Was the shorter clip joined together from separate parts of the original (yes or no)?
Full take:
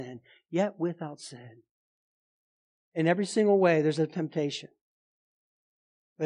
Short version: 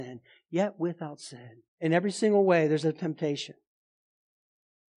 yes